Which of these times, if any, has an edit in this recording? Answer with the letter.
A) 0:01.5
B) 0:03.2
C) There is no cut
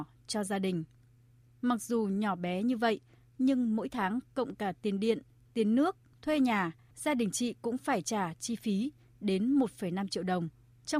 C